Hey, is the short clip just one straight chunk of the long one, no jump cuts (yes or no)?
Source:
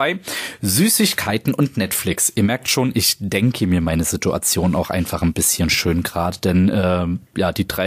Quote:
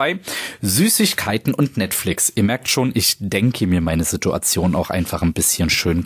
yes